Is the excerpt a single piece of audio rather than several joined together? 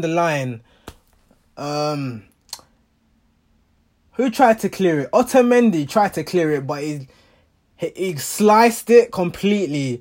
yes; 0 cuts

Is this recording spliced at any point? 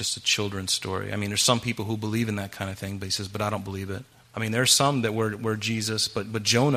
yes; 1 cut; at 4.2 s

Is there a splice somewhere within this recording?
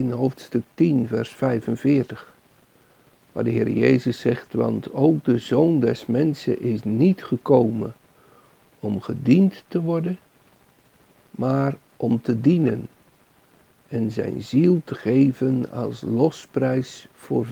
no; 0 cuts

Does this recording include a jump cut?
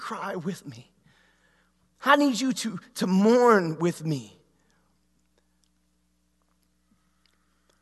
no; 0 cuts

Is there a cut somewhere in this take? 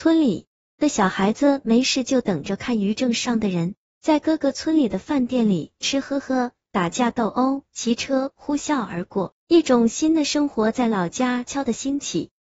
yes; 3 cuts; at 5.8 s, 9.5 s, 11.5 s

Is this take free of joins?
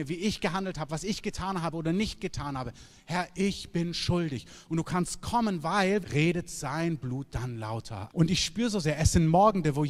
no; 2 cuts; at 6.0 s, 8.1 s

